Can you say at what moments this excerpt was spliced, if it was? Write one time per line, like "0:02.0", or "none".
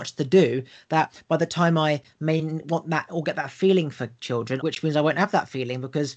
0:04.6